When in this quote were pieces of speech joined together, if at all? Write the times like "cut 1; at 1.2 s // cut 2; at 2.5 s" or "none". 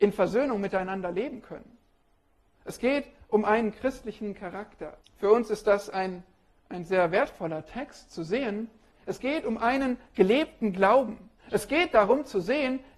cut 1; at 5.0 s // cut 2; at 8.9 s